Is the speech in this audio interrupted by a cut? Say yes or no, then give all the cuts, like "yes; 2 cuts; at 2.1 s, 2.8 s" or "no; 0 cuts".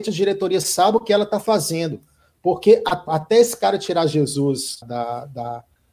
yes; 2 cuts; at 3.1 s, 4.8 s